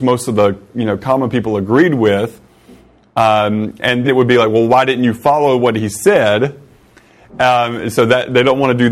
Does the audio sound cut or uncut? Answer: cut